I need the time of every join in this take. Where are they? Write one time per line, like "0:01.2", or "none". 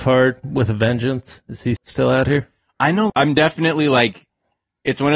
0:01.8
0:03.1